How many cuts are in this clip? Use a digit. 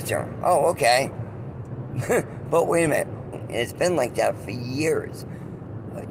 1